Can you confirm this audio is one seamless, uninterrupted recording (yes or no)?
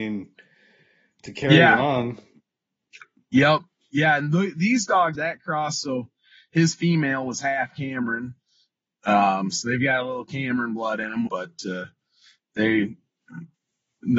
no